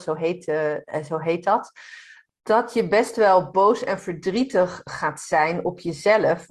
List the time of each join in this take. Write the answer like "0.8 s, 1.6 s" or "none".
none